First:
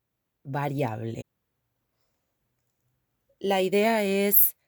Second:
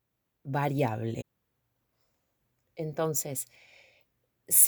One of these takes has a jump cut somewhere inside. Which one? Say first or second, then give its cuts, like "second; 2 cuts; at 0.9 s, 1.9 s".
second; 1 cut; at 2.6 s